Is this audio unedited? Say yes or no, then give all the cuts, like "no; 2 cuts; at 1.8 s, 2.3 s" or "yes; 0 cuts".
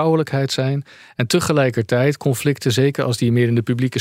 yes; 0 cuts